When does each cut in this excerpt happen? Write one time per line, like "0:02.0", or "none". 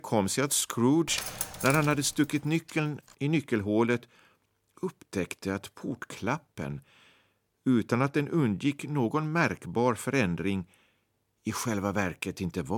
none